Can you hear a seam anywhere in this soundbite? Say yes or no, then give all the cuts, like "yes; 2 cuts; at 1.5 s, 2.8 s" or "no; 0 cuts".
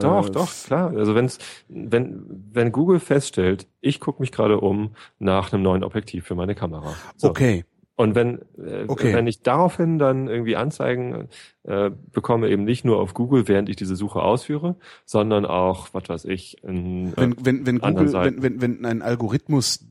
yes; 1 cut; at 17.2 s